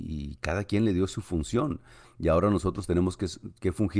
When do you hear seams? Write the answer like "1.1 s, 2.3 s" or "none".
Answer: 2.0 s